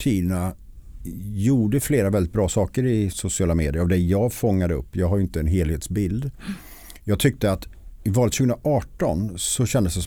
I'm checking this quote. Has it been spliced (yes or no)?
no